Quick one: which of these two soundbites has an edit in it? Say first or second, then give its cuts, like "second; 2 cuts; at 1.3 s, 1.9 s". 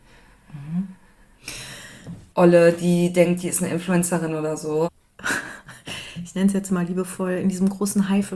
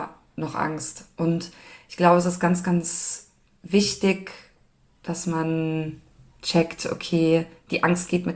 first; 2 cuts; at 2.3 s, 4.8 s